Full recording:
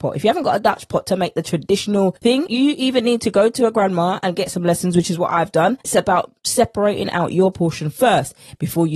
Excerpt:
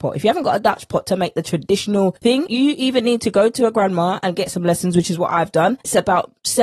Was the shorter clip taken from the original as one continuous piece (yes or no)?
yes